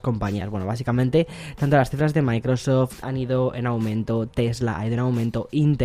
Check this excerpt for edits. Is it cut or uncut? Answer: cut